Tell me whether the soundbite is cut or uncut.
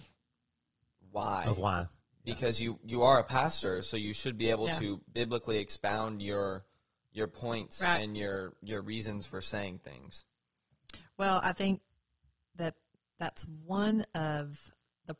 uncut